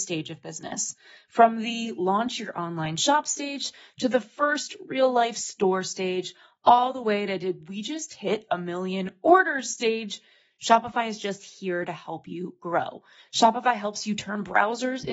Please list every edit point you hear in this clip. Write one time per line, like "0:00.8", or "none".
0:13.2